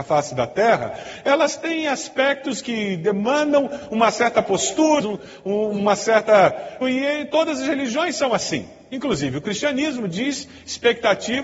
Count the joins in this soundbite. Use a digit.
2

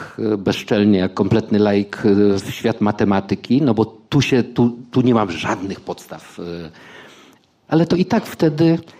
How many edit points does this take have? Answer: 1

